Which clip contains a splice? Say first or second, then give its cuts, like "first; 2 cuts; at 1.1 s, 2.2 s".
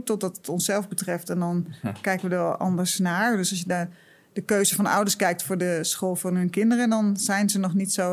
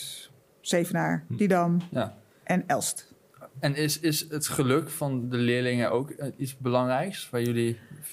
second; 1 cut; at 1.3 s